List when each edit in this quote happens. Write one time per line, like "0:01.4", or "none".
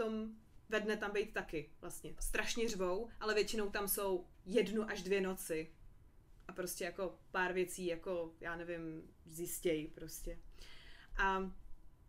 0:02.2